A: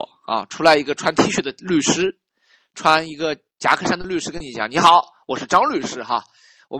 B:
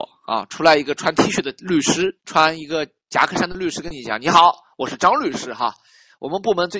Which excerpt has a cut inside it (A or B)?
B